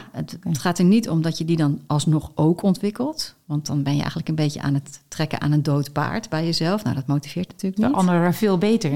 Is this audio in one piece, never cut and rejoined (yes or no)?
yes